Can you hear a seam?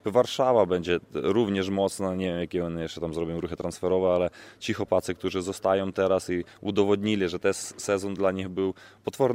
no; 0 cuts

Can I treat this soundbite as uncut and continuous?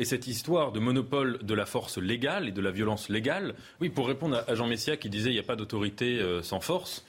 no; 1 cut; at 3.8 s

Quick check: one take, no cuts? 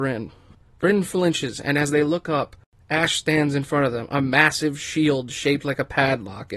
yes; 0 cuts

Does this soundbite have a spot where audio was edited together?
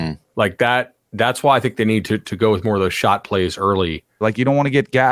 yes; 1 cut; at 4.2 s

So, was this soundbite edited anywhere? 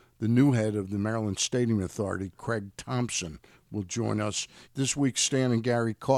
yes; 1 cut; at 4.6 s

